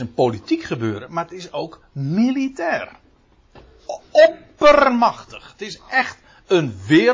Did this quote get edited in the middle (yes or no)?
no